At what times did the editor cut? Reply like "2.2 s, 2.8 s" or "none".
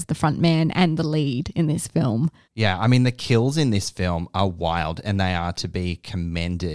2.5 s

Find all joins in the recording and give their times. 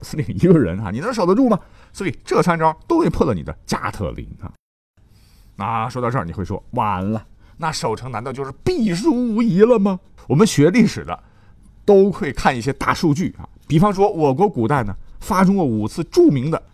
10.2 s, 13.5 s

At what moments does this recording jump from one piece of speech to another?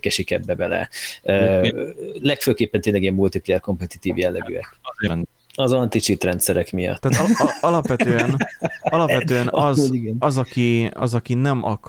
5.1 s, 7.0 s

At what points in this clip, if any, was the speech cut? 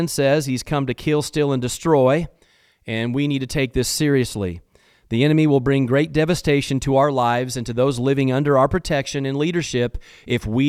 none

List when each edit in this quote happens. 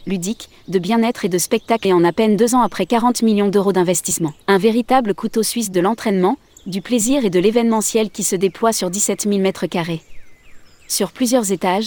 1.8 s, 4.4 s

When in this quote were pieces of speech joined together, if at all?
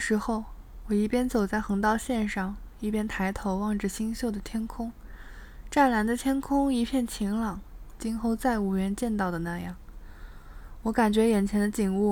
8.0 s

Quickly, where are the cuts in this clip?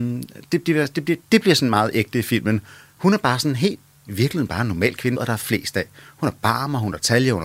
3.0 s, 5.2 s

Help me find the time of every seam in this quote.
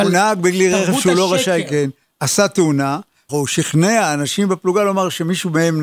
3.3 s

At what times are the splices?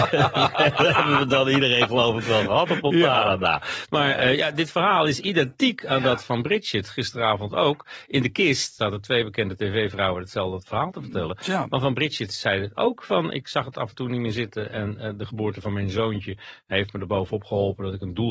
8.8 s

